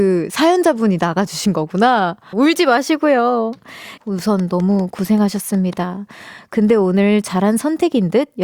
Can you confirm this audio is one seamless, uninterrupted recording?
no; 2 cuts; at 2.3 s, 4.0 s

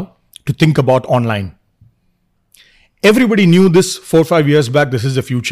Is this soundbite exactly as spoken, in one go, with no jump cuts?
yes; 0 cuts

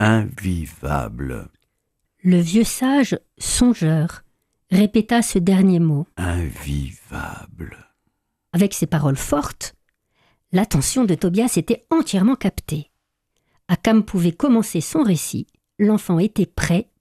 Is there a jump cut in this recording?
yes; 2 cuts; at 6.1 s, 8.5 s

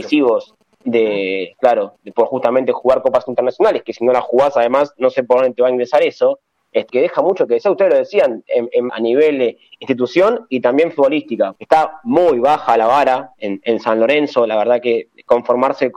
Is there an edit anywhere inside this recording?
yes; 3 cuts; at 6.9 s, 8.9 s, 11.6 s

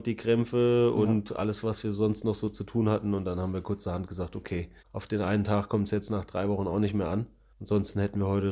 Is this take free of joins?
yes; 0 cuts

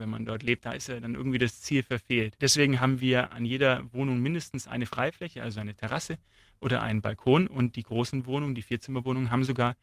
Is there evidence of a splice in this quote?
no; 0 cuts

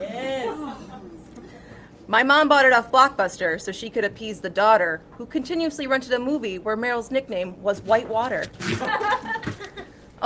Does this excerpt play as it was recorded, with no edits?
yes; 0 cuts

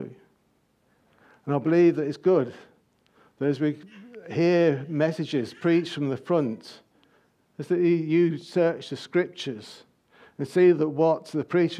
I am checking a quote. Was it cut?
no; 0 cuts

